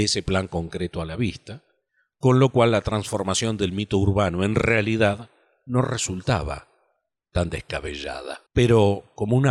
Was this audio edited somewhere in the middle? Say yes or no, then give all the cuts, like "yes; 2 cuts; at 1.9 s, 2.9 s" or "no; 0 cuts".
yes; 1 cut; at 8.5 s